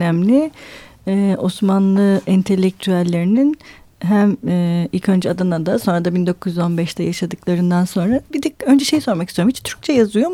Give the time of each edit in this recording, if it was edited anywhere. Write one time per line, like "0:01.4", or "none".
0:08.3